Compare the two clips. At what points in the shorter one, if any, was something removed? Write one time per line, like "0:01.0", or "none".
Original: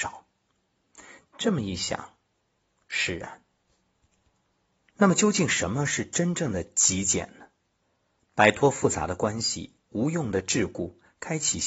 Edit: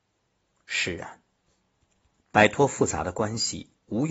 0:02.2